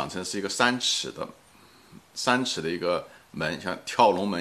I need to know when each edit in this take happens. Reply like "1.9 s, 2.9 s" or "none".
2.0 s